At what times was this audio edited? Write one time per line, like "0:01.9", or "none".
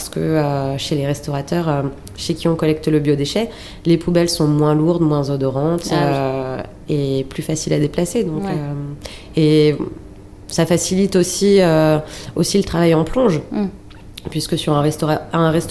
none